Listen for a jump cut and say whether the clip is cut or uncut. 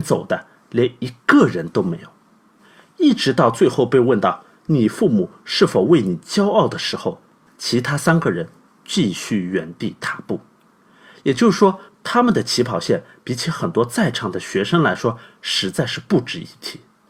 cut